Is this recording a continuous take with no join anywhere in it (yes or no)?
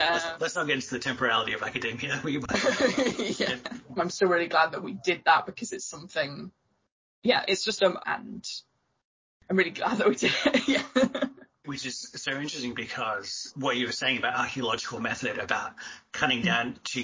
no